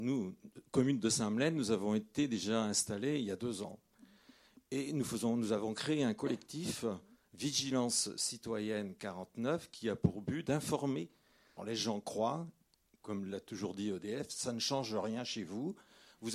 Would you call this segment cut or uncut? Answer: cut